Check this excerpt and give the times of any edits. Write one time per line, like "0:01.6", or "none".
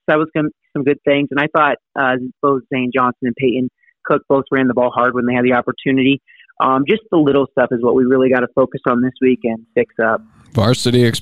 none